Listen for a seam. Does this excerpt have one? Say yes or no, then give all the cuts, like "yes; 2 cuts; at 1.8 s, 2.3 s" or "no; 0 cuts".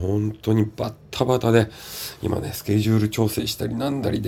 no; 0 cuts